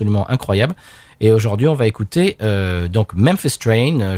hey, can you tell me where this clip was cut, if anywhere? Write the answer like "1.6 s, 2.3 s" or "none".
none

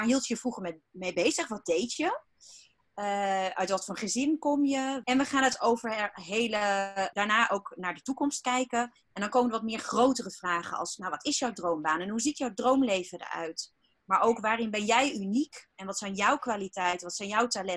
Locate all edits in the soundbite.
5.0 s, 7.1 s

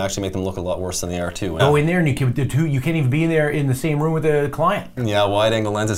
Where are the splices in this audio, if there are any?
1.6 s, 5.0 s

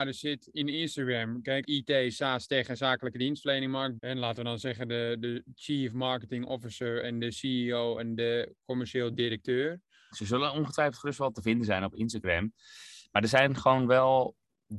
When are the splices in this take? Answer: 1.6 s, 4.0 s, 10.1 s

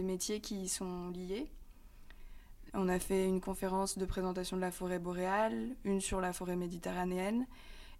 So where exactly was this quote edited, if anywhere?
2.7 s

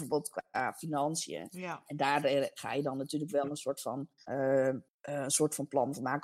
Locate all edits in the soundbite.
4.9 s

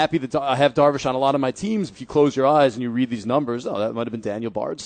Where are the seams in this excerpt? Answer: 1.9 s

